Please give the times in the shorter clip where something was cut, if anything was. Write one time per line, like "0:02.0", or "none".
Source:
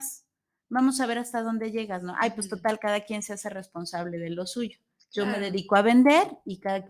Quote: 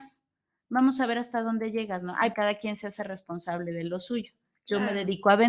0:02.3